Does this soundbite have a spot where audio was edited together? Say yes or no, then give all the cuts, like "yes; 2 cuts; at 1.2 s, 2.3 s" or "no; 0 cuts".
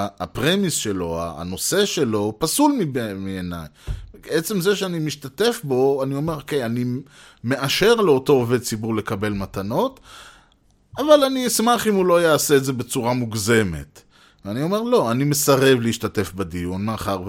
no; 0 cuts